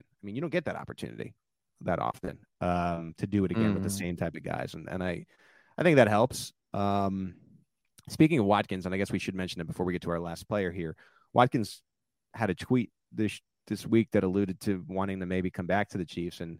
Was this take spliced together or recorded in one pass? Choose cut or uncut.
uncut